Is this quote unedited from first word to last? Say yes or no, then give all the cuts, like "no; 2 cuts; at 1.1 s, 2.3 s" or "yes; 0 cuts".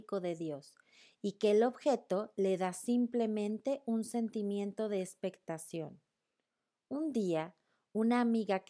yes; 0 cuts